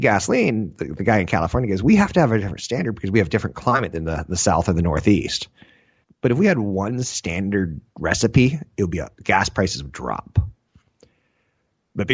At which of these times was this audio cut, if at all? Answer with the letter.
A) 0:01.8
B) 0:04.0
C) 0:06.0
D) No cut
C